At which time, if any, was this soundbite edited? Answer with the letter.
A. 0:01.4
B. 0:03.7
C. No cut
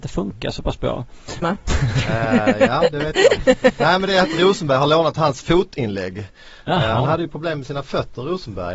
A